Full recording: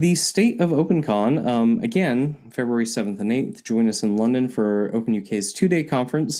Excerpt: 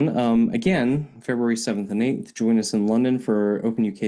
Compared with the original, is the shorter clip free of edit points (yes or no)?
yes